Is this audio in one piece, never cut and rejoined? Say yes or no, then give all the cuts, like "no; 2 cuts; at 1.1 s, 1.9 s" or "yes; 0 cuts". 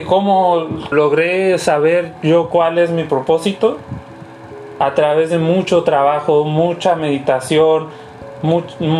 no; 1 cut; at 0.9 s